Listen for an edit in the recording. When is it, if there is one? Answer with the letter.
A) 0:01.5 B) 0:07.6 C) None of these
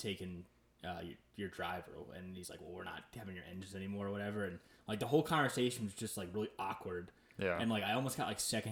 C